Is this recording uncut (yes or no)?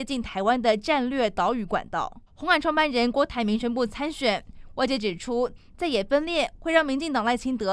no